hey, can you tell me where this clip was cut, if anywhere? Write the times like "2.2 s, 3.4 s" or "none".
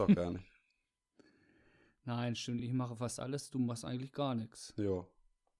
none